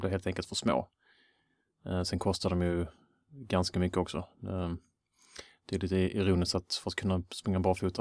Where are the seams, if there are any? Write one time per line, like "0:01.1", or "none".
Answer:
none